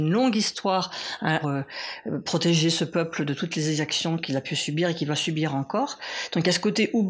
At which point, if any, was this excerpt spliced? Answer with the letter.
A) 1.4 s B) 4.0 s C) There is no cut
A